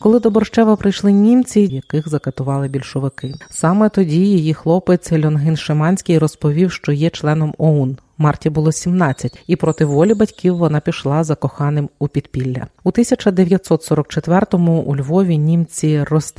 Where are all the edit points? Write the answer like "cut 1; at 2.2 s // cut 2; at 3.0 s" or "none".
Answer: cut 1; at 1.7 s